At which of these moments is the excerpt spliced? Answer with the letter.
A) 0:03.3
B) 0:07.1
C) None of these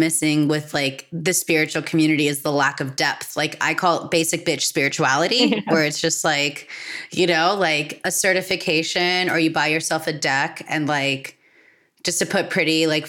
C